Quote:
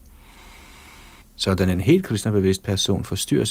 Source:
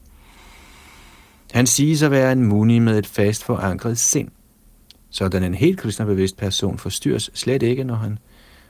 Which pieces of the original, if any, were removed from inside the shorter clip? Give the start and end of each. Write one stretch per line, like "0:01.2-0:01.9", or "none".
0:01.2-0:05.0